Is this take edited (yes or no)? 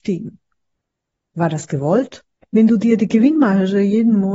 yes